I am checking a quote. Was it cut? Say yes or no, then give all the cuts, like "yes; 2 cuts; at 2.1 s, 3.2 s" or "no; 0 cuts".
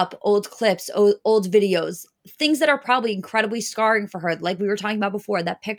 no; 0 cuts